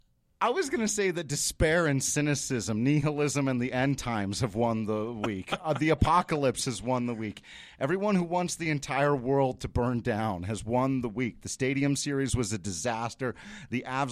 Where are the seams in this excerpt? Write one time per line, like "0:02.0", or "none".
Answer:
none

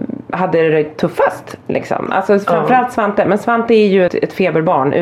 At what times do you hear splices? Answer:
0:04.1

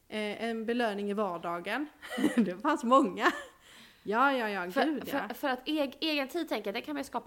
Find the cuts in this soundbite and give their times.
none

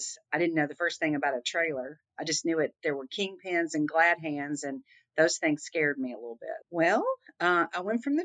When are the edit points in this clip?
0:06.6

